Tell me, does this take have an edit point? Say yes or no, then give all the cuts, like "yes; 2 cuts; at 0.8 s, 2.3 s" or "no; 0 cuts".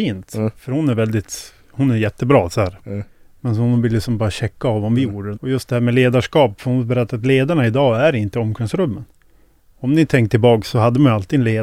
yes; 2 cuts; at 2.8 s, 5.3 s